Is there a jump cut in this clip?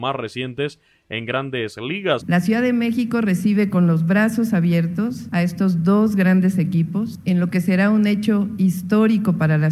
yes; 1 cut; at 2.2 s

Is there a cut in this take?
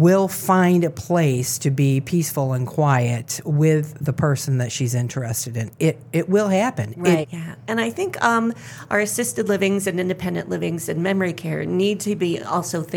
yes; 1 cut; at 7.2 s

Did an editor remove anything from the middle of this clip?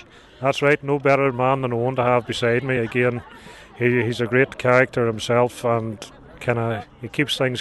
no; 0 cuts

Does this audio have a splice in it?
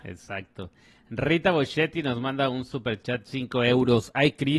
no; 0 cuts

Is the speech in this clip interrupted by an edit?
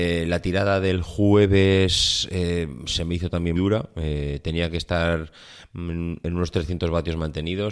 yes; 1 cut; at 3.6 s

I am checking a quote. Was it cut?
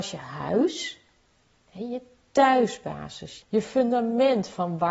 yes; 1 cut; at 3.4 s

